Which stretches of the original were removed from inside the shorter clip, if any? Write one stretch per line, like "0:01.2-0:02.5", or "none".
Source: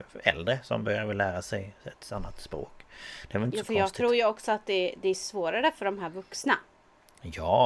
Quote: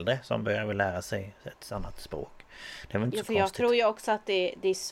none

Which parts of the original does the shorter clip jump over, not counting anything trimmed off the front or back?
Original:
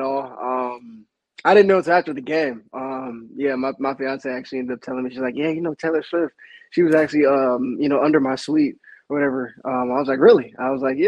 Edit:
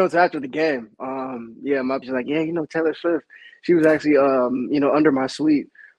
0:03.8-0:05.1

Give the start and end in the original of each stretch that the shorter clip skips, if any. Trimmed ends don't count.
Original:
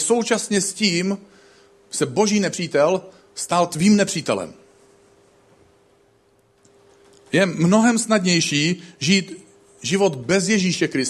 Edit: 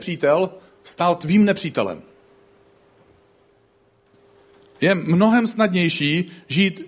none

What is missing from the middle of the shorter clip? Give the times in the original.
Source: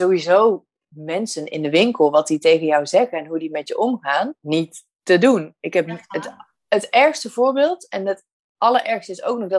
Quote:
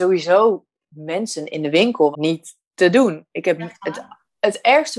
0:02.1-0:04.4

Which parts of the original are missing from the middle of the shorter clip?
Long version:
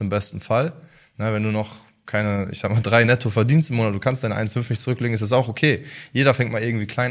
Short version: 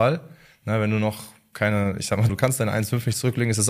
0:02.8-0:03.9

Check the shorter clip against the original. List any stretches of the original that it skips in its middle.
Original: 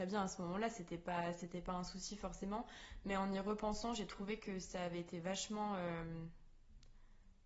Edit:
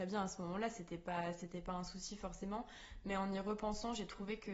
none

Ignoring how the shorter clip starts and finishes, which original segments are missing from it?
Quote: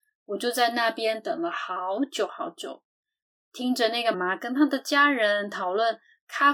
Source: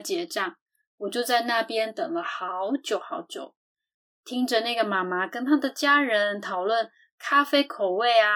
0:04.8-0:05.0

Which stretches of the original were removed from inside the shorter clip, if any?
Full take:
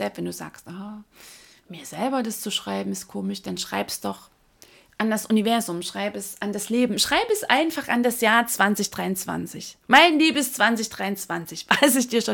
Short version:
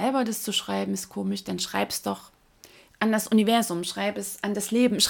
none

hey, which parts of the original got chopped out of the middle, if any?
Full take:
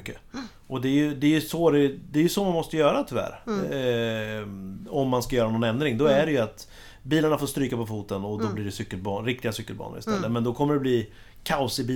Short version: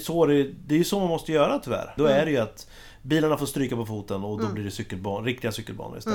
0:03.4-0:06.0

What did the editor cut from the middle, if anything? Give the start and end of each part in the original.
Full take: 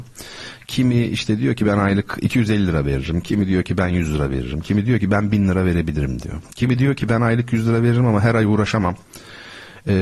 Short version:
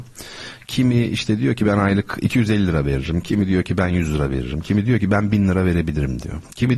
none

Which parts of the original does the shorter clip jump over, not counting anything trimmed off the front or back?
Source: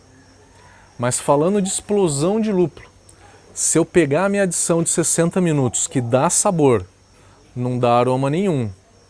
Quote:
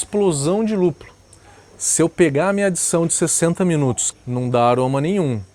0:05.9-0:07.4

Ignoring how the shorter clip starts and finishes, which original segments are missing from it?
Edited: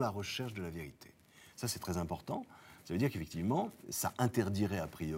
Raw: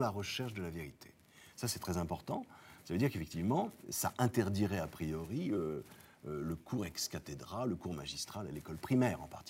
none

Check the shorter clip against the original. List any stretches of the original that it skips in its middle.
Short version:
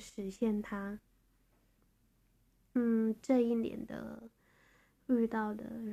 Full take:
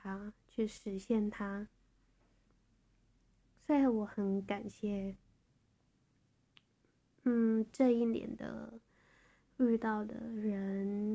0:03.4-0:07.3

